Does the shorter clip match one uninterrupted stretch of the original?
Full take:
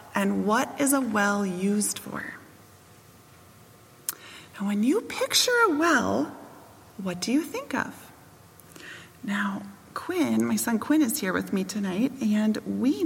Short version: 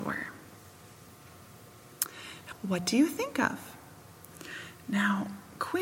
no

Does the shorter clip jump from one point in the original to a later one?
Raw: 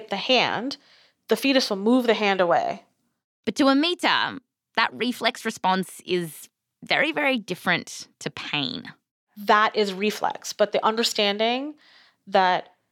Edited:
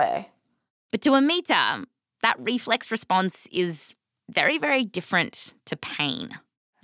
no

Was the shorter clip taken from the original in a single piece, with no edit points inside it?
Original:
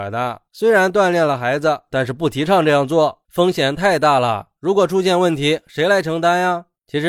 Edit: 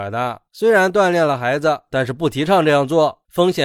yes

